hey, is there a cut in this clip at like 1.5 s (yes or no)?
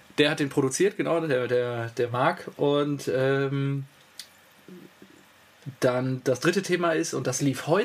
no